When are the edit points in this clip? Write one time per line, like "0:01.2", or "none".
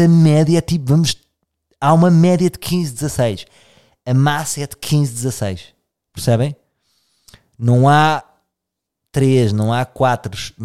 none

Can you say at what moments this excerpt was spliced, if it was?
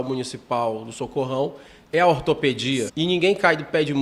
0:02.9

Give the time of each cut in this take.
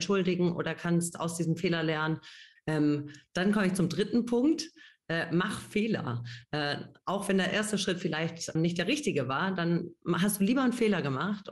0:02.6
0:08.6

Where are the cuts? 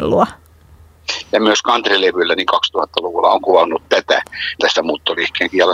0:01.2
0:04.6

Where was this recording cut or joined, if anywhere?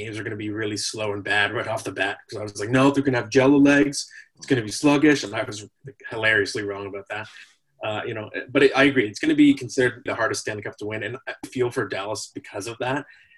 0:10.1
0:11.4

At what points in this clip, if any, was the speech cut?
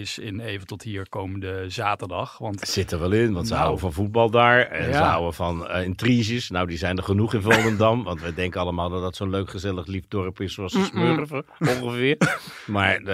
none

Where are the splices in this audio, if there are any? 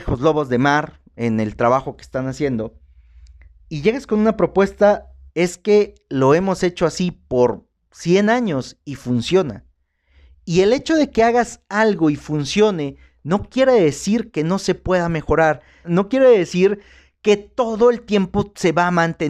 0:05.3
0:15.8

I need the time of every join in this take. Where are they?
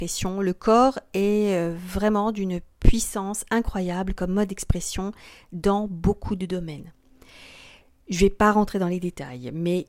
none

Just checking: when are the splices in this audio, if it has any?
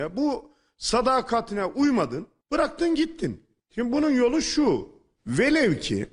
none

